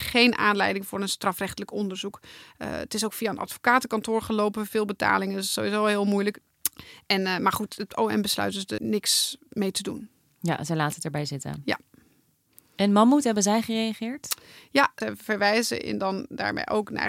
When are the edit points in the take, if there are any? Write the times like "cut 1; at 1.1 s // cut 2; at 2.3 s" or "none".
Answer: cut 1; at 8.8 s